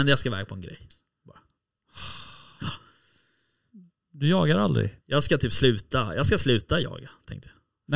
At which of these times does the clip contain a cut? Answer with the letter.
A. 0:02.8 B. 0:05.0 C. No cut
B